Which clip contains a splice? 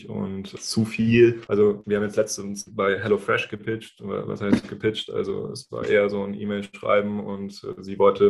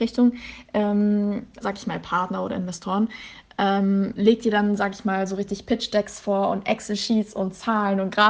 second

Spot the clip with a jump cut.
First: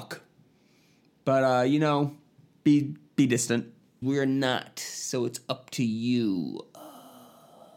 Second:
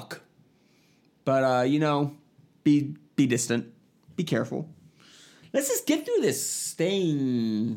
first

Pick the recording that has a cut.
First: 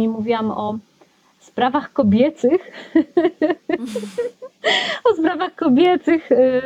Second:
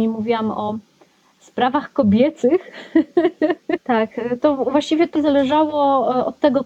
second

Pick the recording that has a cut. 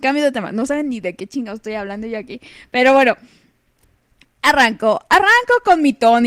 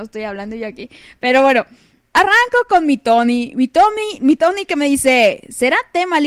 second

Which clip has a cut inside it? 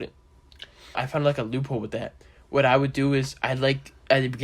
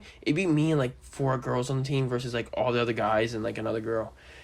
first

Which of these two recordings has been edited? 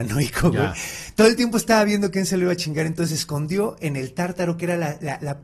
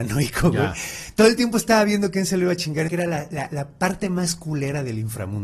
second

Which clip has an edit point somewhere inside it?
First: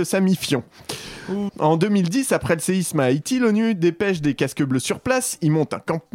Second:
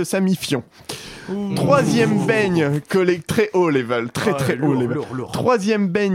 first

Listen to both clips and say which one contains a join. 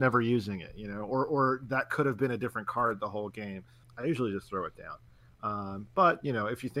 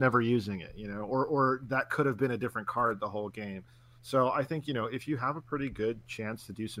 first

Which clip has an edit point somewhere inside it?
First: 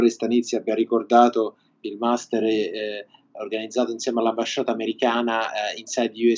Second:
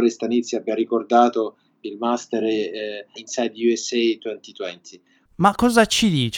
second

